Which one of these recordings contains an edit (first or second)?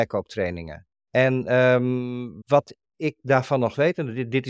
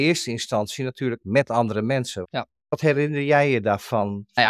second